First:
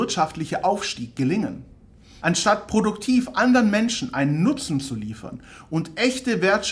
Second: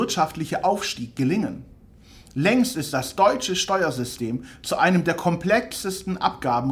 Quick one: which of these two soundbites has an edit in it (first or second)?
first